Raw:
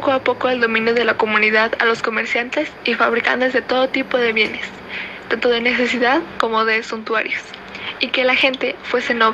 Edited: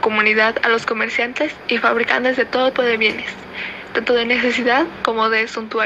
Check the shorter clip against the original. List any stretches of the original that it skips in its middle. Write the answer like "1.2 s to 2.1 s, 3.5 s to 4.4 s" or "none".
3.9 s to 4.1 s